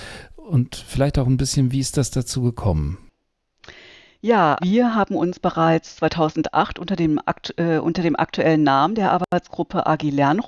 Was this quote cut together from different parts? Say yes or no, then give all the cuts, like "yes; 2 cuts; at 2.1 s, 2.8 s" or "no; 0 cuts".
yes; 1 cut; at 4.6 s